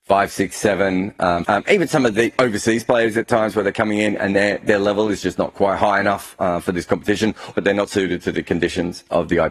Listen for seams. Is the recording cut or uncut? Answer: cut